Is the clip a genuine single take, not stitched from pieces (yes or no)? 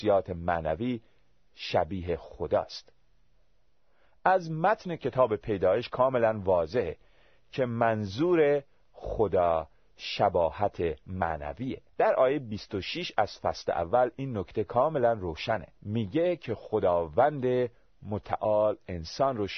no